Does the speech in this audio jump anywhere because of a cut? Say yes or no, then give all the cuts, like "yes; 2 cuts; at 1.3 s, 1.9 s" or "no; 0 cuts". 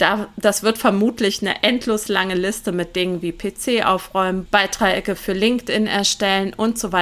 yes; 1 cut; at 4.5 s